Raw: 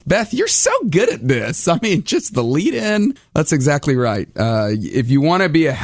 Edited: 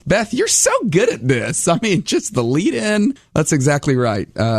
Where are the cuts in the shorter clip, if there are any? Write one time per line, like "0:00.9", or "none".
none